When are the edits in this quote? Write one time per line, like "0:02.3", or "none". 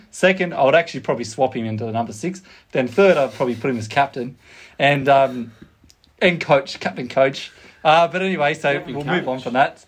none